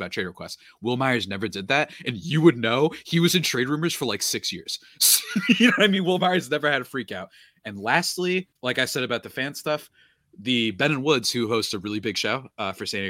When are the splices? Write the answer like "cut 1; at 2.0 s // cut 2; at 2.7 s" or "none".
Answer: cut 1; at 8.5 s